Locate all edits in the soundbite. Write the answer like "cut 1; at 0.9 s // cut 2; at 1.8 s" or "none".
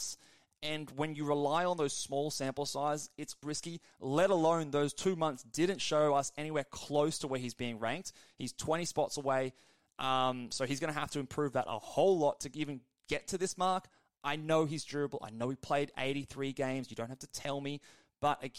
cut 1; at 3.4 s

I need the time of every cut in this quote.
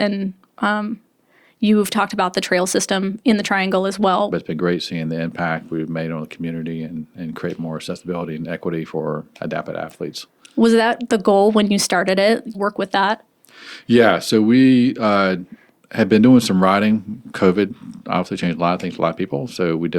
cut 1; at 4.3 s // cut 2; at 12.5 s

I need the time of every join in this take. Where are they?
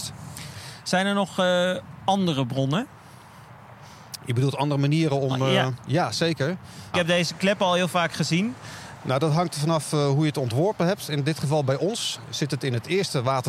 cut 1; at 6.9 s // cut 2; at 9.0 s

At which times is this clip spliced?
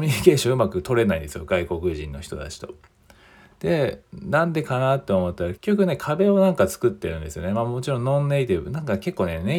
cut 1; at 5.6 s

